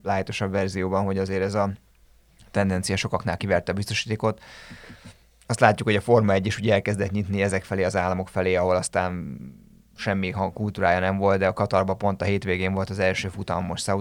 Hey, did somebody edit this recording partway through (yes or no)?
no